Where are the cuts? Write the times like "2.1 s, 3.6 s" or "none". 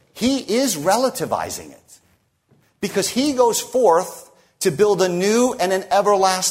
none

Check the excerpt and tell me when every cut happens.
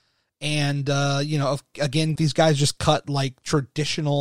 2.2 s

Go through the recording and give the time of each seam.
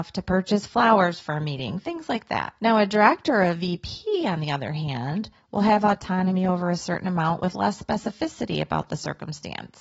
none

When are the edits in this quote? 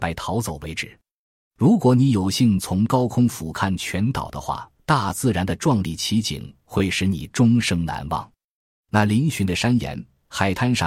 4.8 s

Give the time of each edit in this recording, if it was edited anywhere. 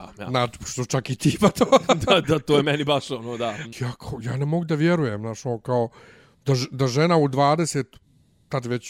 3.7 s

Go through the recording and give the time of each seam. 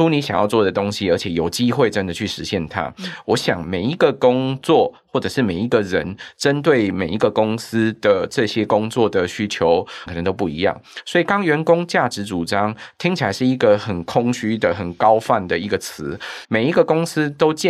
10.1 s, 16.4 s

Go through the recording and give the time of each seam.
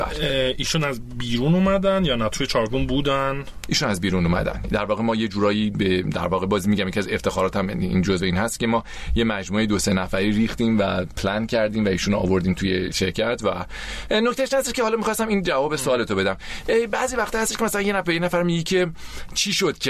12.9 s

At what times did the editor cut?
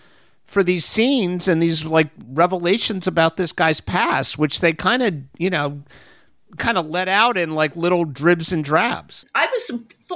none

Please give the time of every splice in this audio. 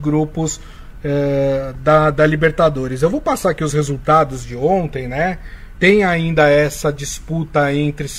5.8 s

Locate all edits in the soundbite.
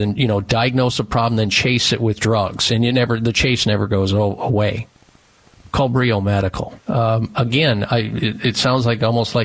6.8 s

